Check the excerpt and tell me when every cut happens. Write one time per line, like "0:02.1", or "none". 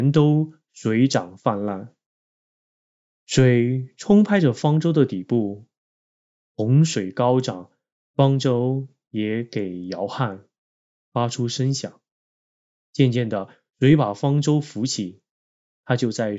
none